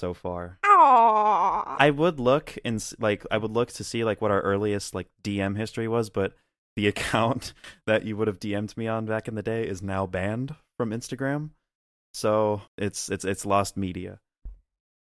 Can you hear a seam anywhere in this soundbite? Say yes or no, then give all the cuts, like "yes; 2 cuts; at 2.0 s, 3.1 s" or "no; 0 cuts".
yes; 2 cuts; at 1.8 s, 12.7 s